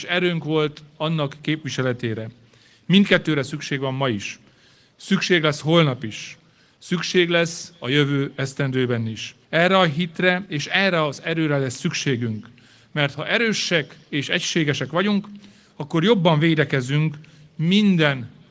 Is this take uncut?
no; 1 cut; at 9.4 s

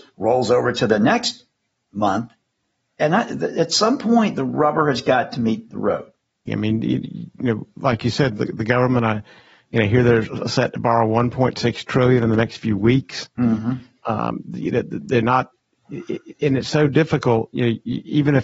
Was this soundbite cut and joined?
yes; 1 cut; at 6.5 s

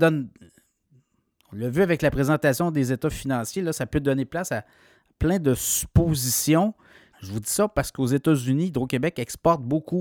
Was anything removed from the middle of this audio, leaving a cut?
yes; 1 cut; at 7.1 s

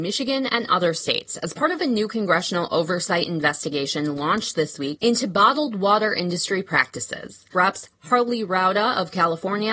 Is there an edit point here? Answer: yes; 1 cut; at 7.5 s

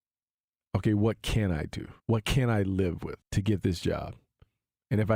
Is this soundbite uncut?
no; 2 cuts; at 2.0 s, 3.2 s

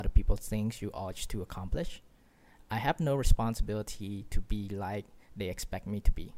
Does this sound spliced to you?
no; 0 cuts

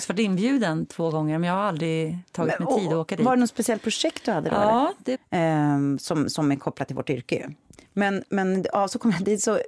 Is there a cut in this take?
yes; 1 cut; at 5.2 s

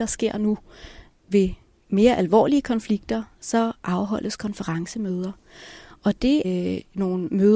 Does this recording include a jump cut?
yes; 1 cut; at 6.4 s

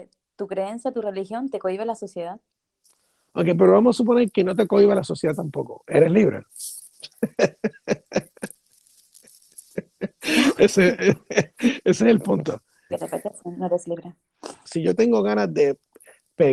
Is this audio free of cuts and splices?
no; 2 cuts; at 12.9 s, 14.7 s

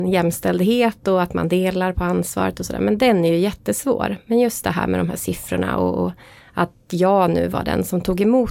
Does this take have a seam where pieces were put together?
no; 0 cuts

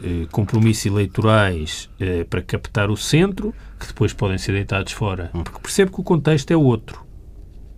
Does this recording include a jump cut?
yes; 1 cut; at 5.4 s

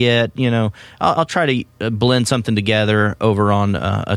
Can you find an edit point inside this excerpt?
no; 0 cuts

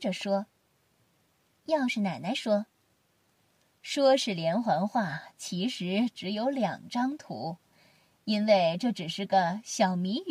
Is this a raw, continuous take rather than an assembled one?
yes; 0 cuts

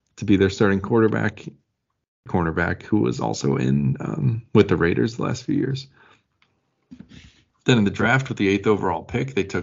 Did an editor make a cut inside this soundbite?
yes; 2 cuts; at 2.3 s, 7.5 s

